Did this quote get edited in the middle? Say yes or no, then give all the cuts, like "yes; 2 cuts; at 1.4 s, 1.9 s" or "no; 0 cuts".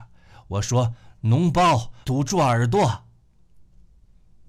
yes; 1 cut; at 2.0 s